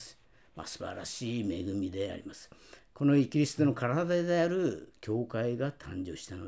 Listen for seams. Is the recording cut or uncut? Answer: uncut